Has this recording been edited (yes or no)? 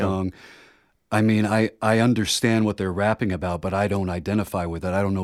no